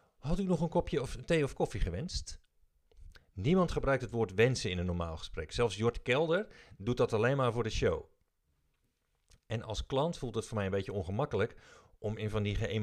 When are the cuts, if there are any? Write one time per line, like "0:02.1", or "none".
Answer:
0:03.1